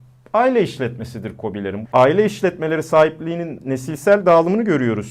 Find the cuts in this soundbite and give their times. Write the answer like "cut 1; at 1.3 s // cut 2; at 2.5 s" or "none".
cut 1; at 1.8 s